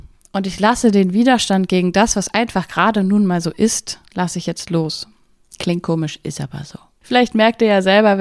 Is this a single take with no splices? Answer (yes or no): no